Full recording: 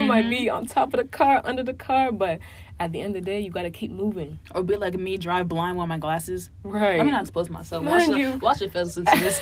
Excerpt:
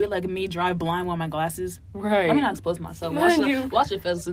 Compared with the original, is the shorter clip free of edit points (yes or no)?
yes